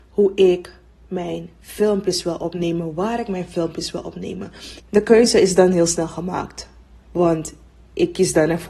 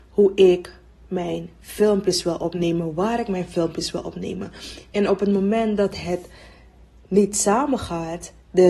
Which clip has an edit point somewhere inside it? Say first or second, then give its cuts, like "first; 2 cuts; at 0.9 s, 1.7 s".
first; 1 cut; at 4.8 s